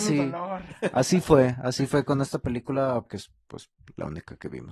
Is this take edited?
yes; 1 cut; at 3.1 s

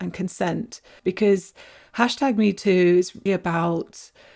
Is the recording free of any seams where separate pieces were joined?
no; 2 cuts; at 1.0 s, 3.3 s

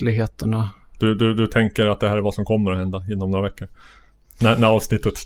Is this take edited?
no; 0 cuts

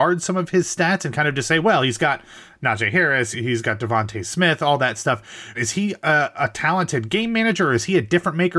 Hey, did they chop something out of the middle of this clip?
yes; 2 cuts; at 3.3 s, 5.5 s

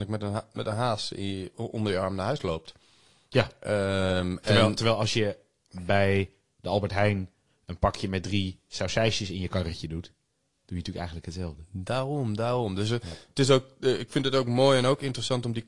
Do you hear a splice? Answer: no; 0 cuts

